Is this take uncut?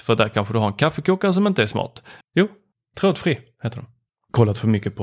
no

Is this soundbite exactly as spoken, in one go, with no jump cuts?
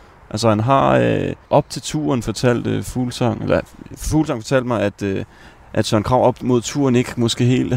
no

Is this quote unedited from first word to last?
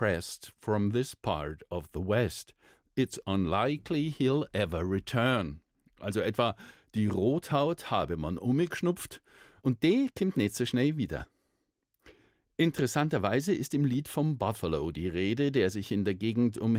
yes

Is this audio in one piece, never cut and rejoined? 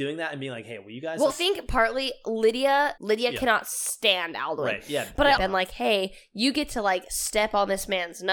no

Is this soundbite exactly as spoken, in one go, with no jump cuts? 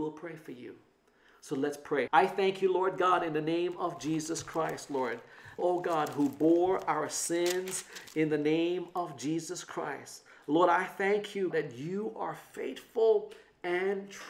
no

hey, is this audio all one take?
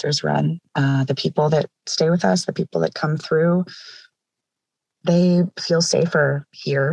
yes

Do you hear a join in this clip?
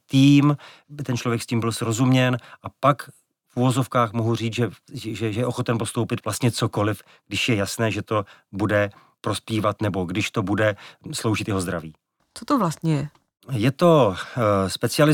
yes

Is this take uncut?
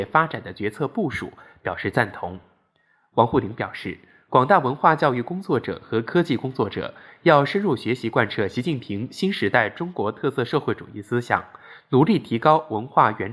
yes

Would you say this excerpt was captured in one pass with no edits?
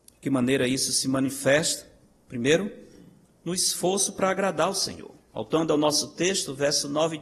no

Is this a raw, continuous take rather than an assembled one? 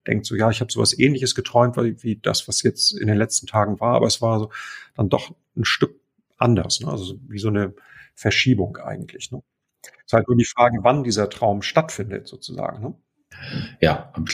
yes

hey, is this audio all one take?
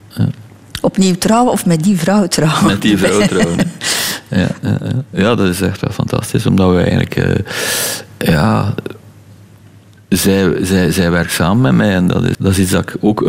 no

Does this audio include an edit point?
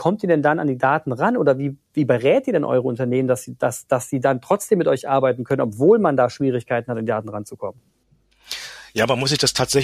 no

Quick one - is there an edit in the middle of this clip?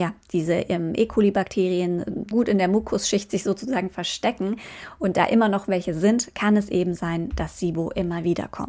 yes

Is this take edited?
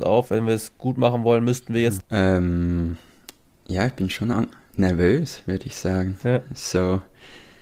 yes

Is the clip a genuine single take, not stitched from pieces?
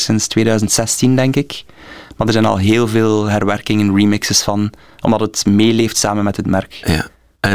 yes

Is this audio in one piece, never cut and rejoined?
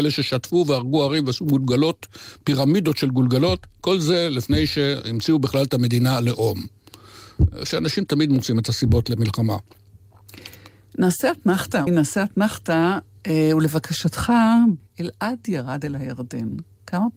no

